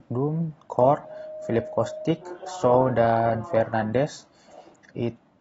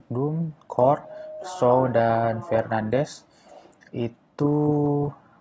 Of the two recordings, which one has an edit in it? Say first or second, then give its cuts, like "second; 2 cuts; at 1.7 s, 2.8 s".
second; 1 cut; at 1.4 s